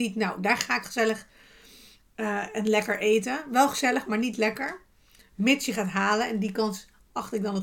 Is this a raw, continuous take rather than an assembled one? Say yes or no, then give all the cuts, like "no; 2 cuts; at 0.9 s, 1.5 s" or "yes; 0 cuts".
yes; 0 cuts